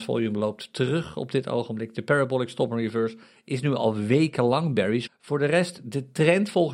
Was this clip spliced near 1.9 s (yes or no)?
no